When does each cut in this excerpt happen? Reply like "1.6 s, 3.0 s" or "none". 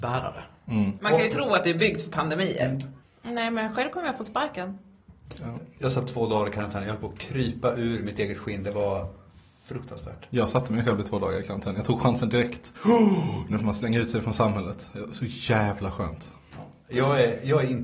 1.0 s, 3.0 s